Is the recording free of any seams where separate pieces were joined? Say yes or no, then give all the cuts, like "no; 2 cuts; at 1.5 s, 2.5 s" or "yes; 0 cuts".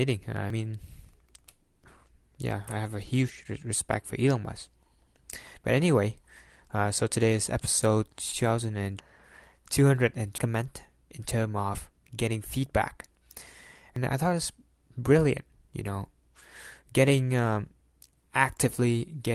yes; 0 cuts